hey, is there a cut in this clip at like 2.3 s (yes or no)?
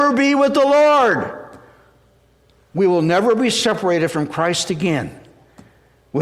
no